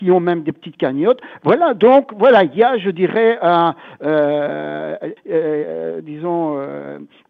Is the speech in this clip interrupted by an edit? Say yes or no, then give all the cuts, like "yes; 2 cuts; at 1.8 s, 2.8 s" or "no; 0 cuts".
yes; 1 cut; at 5.2 s